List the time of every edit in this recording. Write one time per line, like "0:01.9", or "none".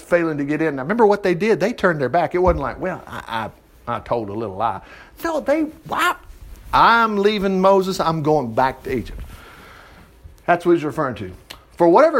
none